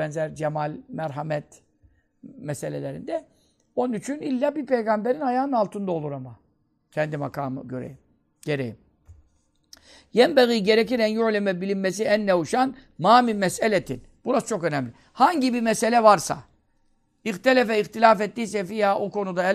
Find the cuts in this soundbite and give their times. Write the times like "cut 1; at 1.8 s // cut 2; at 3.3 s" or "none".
none